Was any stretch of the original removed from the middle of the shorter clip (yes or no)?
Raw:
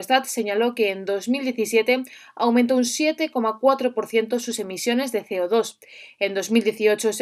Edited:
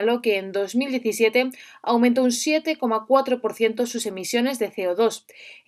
no